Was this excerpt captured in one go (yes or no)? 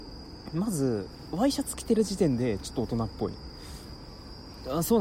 yes